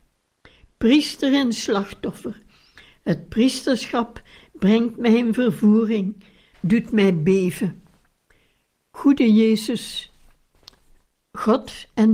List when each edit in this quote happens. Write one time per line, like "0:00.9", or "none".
0:06.5